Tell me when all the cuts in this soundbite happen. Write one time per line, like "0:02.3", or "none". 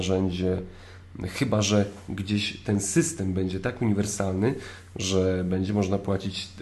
none